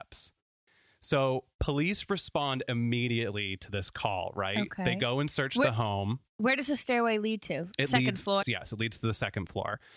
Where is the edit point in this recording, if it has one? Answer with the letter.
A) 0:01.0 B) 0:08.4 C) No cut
B